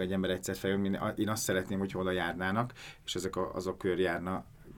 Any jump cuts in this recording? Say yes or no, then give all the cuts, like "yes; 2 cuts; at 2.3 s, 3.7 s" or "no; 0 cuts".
no; 0 cuts